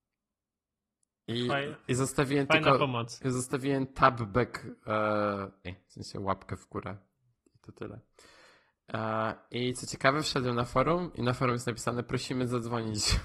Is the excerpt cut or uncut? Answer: cut